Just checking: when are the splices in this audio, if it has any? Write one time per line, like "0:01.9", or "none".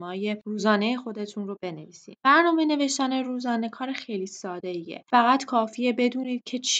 none

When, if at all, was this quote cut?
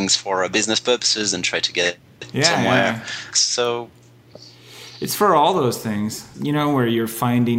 0:03.3
0:06.3

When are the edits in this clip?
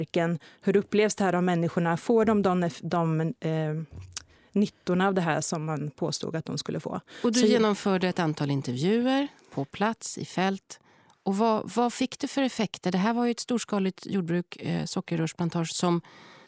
none

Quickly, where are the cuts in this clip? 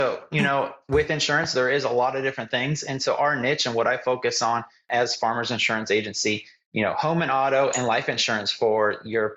none

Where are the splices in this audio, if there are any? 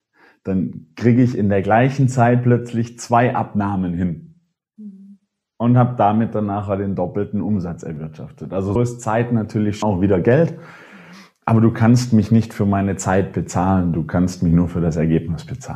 0:08.8
0:09.8

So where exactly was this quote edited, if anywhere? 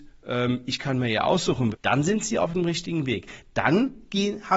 0:01.7

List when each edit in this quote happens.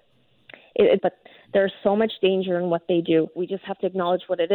0:01.0
0:03.4

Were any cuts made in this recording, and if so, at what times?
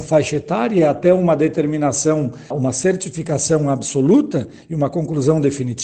0:02.5

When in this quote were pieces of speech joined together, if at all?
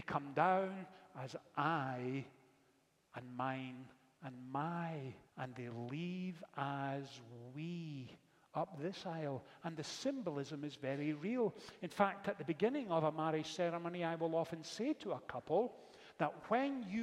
0:05.3

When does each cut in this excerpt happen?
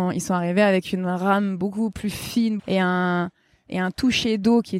0:02.6

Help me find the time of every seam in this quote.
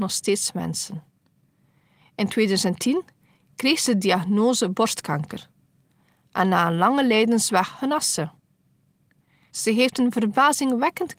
0:09.5

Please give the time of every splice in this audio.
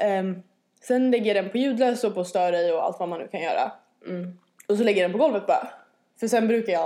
none

